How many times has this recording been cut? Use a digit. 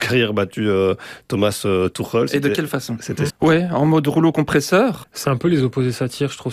2